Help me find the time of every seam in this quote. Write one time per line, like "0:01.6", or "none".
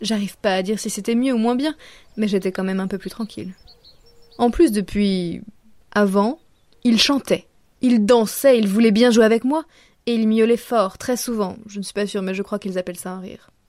0:05.8